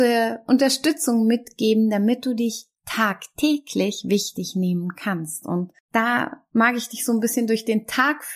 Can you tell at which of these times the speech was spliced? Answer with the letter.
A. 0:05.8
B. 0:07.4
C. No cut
A